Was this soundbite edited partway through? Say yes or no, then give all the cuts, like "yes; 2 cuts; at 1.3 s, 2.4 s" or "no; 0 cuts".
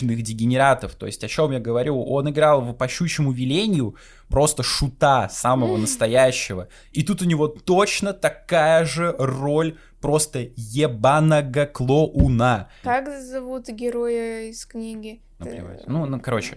yes; 2 cuts; at 12.8 s, 15.4 s